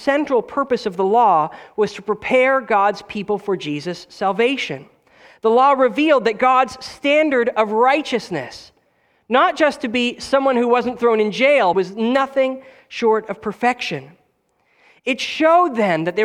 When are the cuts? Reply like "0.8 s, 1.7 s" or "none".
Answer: 11.7 s